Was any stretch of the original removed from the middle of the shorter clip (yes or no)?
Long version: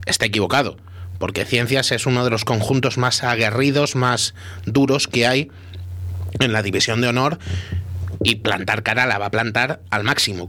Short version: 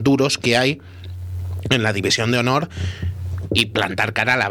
no